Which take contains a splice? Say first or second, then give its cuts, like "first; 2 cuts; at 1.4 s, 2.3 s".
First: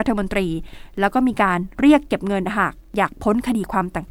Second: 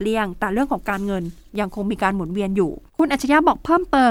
second; 1 cut; at 2.9 s